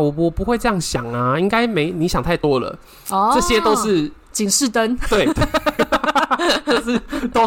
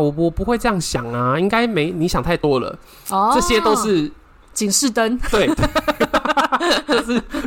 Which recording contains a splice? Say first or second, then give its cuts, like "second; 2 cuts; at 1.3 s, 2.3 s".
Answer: first; 1 cut; at 4.2 s